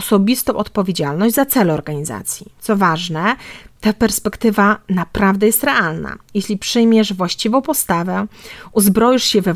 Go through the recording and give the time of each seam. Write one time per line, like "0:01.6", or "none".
none

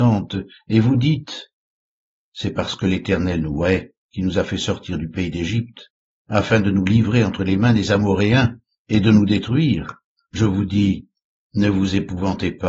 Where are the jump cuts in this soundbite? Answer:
0:10.2

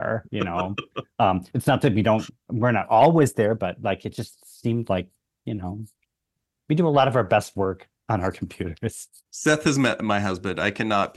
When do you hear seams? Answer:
none

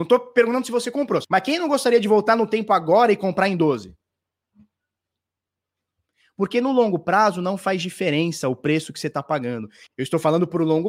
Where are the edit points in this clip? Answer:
0:01.2
0:09.9

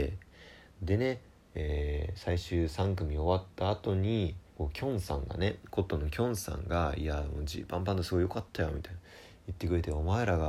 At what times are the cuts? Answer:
0:04.5

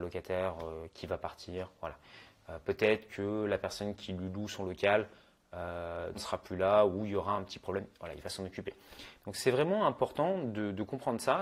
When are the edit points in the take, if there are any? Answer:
0:06.1
0:09.2

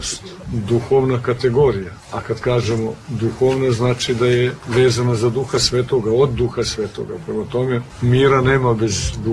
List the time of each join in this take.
none

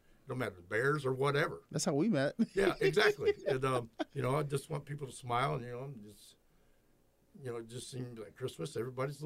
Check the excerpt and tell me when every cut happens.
0:04.1

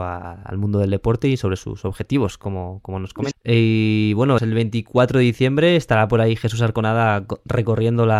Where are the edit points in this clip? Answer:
0:03.3
0:04.4

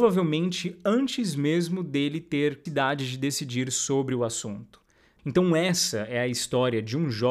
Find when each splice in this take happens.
0:02.7
0:05.2

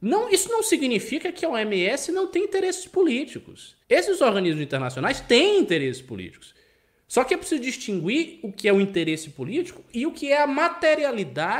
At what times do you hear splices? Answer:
0:03.8

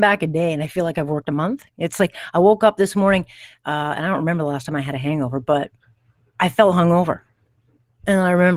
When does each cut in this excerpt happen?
none

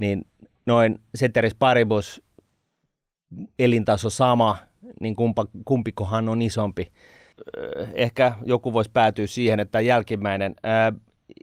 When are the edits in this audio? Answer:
none

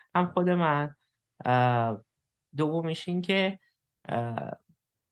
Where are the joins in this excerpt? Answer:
0:02.4

